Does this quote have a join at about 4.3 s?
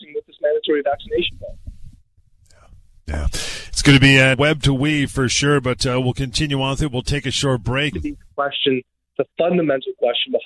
yes; 2 cuts; at 4.3 s, 7.9 s

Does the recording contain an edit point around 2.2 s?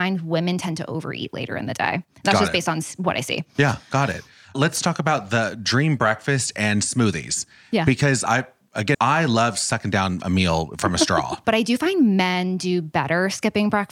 no; 2 cuts; at 8.9 s, 11.4 s

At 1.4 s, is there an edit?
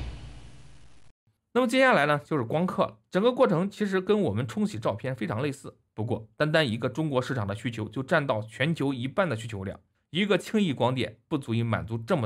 no; 2 cuts; at 3.1 s, 5.9 s

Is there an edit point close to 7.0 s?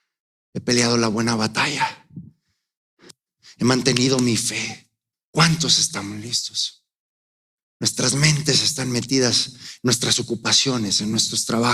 no; 0 cuts

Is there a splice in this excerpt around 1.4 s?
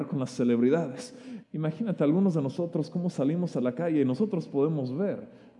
yes; 1 cut; at 1.4 s

